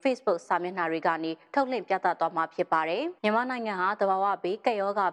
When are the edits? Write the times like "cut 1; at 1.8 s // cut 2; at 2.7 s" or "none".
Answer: cut 1; at 3.2 s